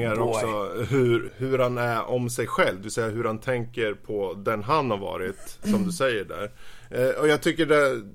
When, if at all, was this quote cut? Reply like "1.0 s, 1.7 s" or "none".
1.3 s

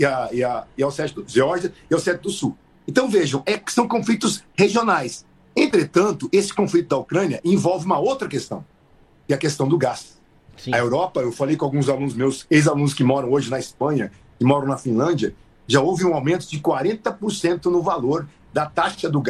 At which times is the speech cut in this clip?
none

